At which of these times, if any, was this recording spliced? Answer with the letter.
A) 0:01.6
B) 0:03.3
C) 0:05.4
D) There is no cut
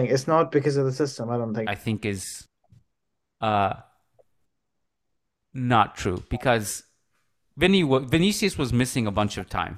A